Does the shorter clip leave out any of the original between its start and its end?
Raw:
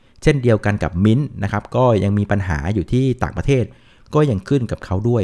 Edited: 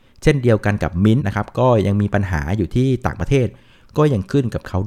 yes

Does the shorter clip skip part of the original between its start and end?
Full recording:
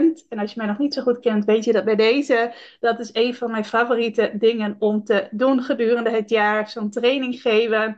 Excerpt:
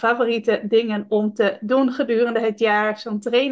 no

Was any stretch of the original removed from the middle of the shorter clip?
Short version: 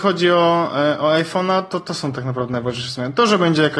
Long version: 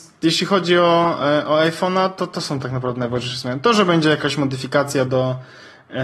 no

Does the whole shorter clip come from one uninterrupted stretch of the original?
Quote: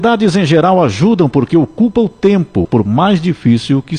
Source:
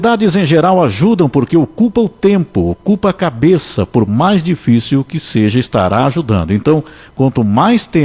no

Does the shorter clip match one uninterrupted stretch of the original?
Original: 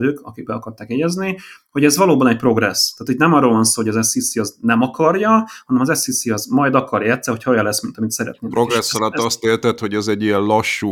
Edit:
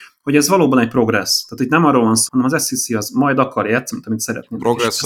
no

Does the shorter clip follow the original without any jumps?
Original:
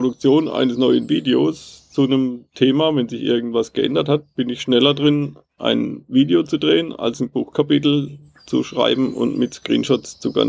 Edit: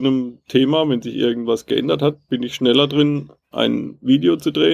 yes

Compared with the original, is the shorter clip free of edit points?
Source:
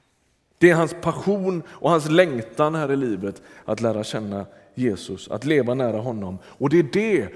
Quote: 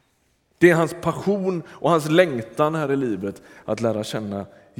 yes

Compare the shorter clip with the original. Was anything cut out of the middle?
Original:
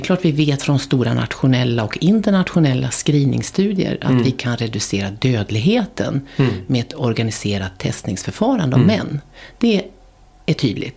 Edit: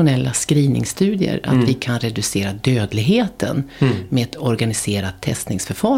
no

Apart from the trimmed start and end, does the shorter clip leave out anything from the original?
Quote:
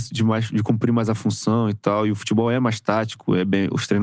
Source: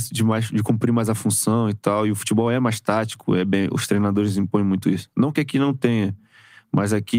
no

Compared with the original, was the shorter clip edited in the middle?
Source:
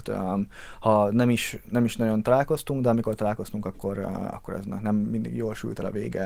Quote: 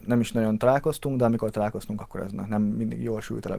yes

